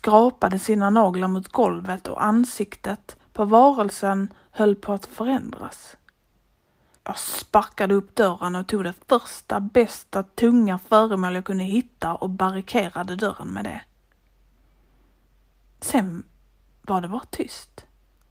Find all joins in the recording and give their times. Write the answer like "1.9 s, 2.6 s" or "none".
7.0 s